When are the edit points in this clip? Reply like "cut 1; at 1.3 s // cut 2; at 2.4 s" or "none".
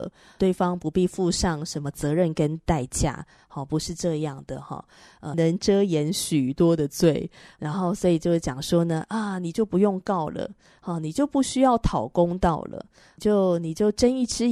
cut 1; at 5.3 s